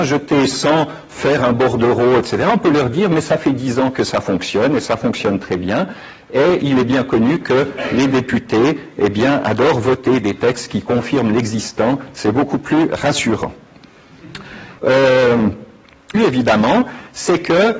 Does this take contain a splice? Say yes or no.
yes